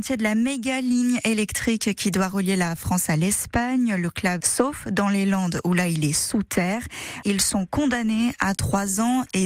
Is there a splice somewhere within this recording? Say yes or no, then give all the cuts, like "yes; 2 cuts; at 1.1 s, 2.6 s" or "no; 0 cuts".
yes; 2 cuts; at 4.4 s, 7.2 s